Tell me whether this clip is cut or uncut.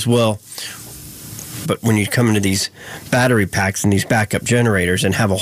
cut